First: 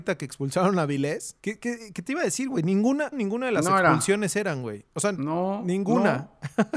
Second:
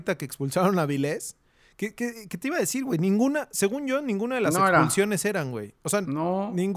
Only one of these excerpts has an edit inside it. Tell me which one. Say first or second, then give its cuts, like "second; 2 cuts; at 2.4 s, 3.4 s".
first; 2 cuts; at 1.4 s, 3.1 s